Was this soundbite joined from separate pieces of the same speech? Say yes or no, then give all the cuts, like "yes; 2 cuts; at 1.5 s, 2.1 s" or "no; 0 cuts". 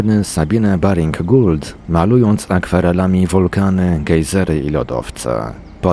yes; 1 cut; at 1.8 s